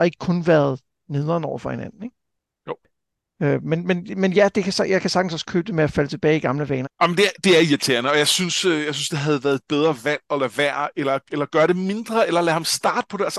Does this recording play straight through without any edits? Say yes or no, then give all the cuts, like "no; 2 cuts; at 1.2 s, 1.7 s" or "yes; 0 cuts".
no; 1 cut; at 6.8 s